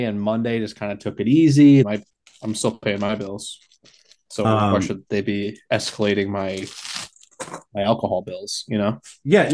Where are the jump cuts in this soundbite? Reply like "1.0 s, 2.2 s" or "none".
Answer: 1.8 s